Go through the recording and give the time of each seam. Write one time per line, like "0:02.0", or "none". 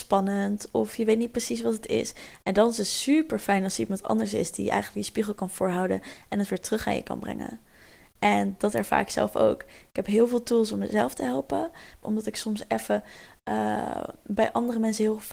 0:12.0

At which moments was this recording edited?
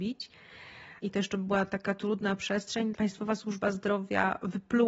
0:01.0
0:02.9

